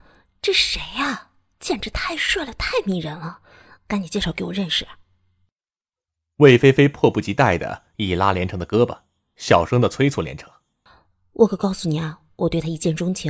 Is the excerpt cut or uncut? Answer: uncut